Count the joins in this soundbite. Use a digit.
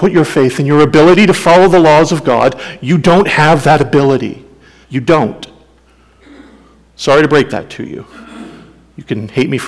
1